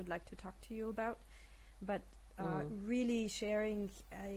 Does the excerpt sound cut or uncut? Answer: uncut